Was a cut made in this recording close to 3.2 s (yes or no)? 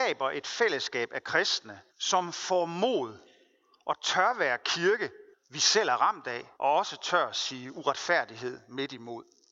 no